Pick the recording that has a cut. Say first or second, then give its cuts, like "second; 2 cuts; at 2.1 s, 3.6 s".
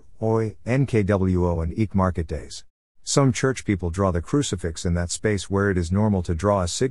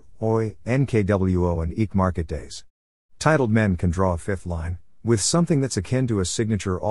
first; 1 cut; at 2.9 s